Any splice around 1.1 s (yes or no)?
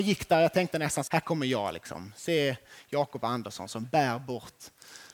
yes